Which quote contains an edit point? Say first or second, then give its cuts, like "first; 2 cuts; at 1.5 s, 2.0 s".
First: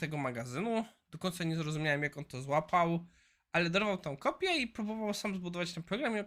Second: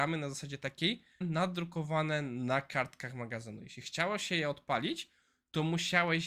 second; 1 cut; at 1.2 s